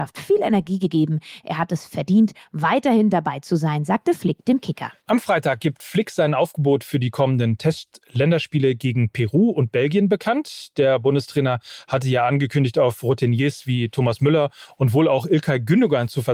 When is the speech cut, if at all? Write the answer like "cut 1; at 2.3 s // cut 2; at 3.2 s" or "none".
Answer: cut 1; at 5.0 s